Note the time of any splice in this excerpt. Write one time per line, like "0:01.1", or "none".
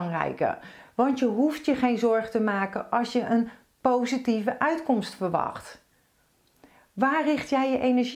none